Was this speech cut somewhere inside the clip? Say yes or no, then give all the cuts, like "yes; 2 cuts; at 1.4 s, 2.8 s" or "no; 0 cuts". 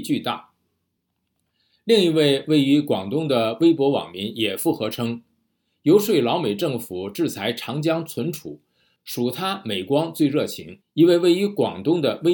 yes; 1 cut; at 10.8 s